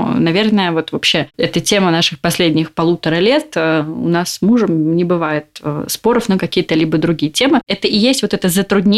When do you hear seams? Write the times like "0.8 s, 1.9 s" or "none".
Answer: 7.6 s

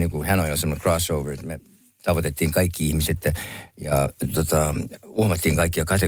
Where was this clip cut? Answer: none

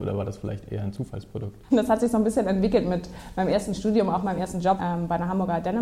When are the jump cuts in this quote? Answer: 1.7 s, 4.8 s

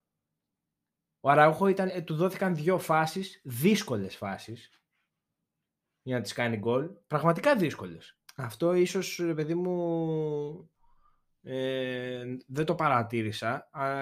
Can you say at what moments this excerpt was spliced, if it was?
1.9 s, 8.2 s

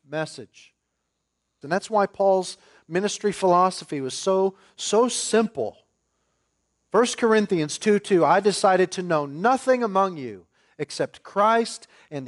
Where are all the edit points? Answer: 1.6 s

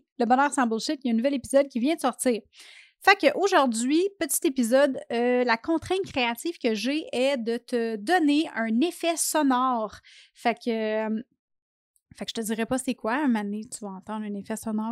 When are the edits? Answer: none

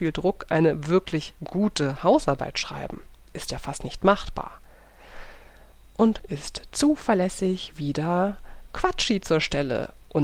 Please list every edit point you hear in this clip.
6.2 s

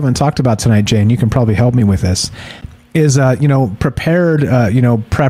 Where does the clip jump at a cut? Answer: none

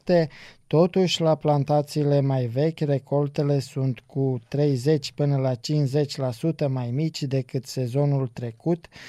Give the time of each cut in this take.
none

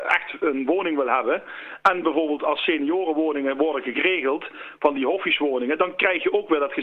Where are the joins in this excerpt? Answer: none

